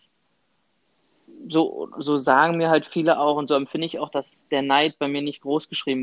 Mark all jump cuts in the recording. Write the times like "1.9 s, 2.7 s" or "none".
none